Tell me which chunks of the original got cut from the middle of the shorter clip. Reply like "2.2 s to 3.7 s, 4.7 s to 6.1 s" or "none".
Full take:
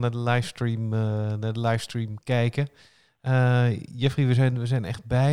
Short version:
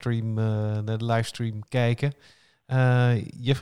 none